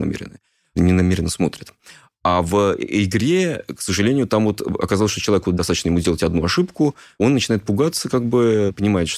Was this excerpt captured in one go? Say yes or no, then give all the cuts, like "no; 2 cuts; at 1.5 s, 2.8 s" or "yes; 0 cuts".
yes; 0 cuts